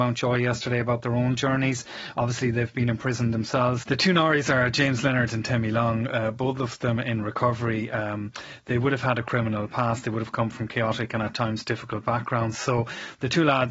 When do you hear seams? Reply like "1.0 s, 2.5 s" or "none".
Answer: 3.8 s